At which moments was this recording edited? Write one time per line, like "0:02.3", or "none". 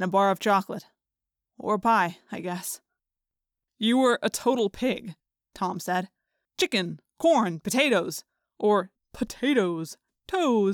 0:09.0